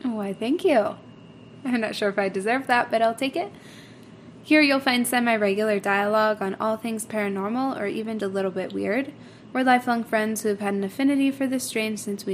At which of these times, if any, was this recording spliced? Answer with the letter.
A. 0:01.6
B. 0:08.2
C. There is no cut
B